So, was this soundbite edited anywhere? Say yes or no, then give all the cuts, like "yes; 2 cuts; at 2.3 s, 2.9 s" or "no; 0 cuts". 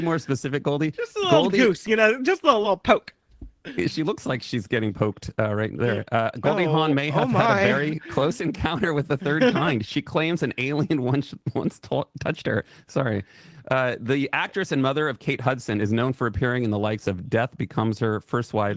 no; 0 cuts